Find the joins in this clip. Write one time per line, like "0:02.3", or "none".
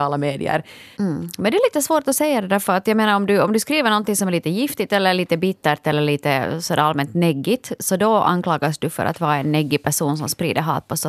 0:01.0